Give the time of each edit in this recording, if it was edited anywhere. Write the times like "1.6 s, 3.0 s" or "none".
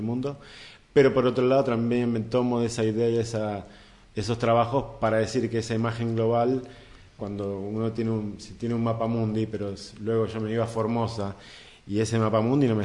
7.2 s